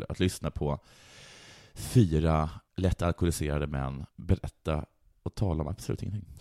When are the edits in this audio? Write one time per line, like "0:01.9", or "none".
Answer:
0:02.7
0:04.1